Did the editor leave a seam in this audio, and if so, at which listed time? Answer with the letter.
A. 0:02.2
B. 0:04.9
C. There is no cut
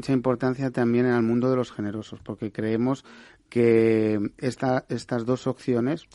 C